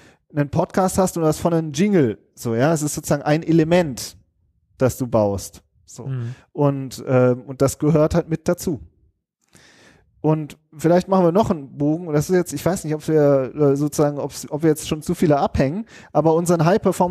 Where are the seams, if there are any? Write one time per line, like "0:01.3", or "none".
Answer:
none